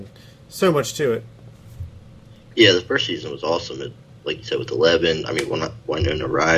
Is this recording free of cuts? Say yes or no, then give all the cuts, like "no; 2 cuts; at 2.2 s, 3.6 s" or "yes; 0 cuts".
yes; 0 cuts